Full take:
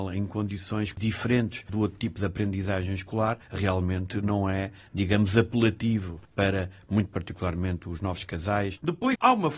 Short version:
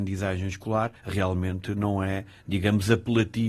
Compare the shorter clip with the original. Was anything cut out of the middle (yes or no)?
no